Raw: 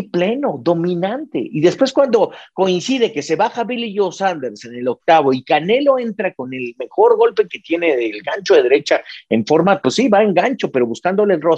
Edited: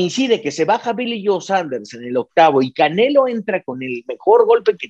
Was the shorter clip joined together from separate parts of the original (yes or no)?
no